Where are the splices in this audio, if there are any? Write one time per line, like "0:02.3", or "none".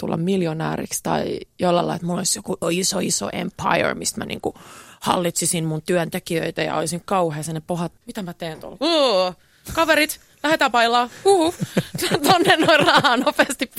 0:02.6
0:08.0

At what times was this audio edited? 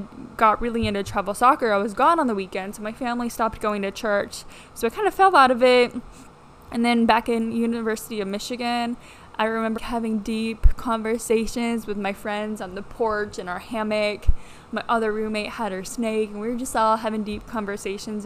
0:09.8

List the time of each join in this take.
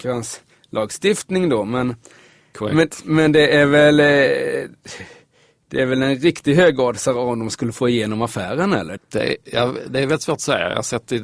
0:09.0

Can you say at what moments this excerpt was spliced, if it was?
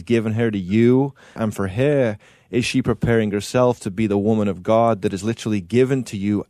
0:01.4

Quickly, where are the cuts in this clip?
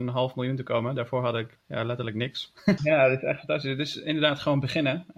0:01.6
0:02.8

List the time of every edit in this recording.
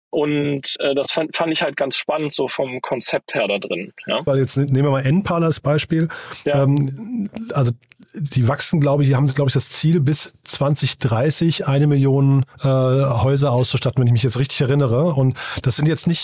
0:04.3
0:12.5

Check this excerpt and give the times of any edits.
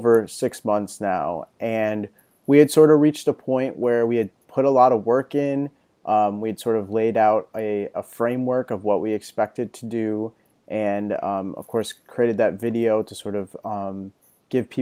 none

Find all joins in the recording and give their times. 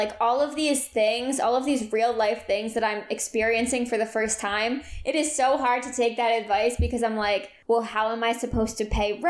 0:07.6

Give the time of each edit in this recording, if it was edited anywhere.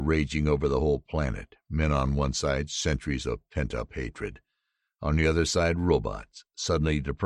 none

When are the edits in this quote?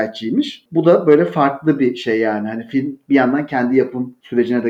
none

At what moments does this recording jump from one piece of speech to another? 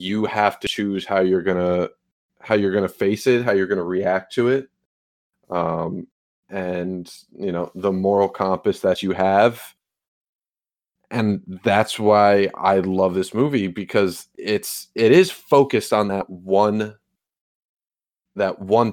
none

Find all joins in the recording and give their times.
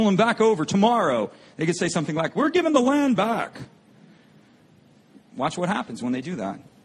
none

